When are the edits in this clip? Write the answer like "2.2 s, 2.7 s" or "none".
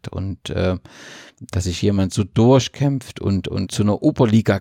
3.7 s